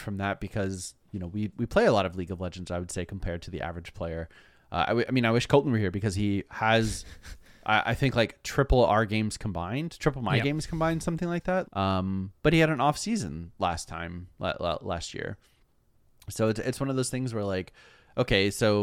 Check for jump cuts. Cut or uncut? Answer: cut